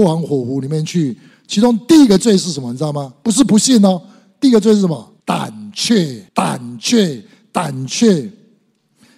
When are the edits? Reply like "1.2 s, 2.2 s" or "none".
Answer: 5.2 s, 6.3 s